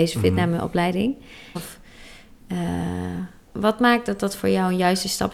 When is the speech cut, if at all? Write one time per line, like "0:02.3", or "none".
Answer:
0:01.6
0:03.5